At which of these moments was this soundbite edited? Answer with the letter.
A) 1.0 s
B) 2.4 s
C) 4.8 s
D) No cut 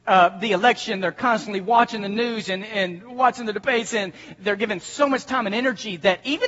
D